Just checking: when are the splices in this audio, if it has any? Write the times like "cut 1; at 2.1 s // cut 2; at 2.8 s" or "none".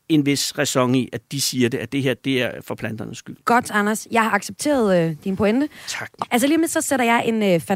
cut 1; at 3.4 s // cut 2; at 6.2 s